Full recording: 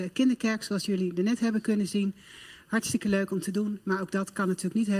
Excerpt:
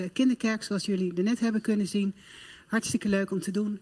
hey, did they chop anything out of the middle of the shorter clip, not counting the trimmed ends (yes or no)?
no